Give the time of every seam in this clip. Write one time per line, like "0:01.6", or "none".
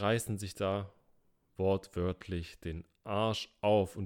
none

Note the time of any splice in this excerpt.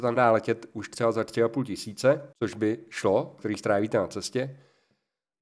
0:02.3
0:03.4

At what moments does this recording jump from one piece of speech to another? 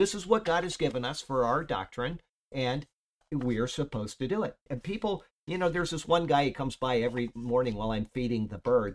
0:04.7

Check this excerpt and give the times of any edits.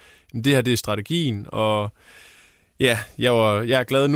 none

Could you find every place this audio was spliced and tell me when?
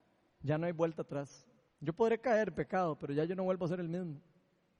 0:01.7

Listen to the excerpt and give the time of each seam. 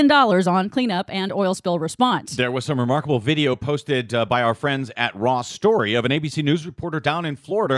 none

